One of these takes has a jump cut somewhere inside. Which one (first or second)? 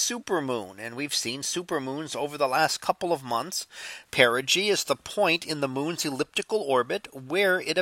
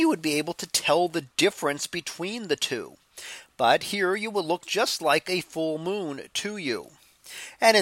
first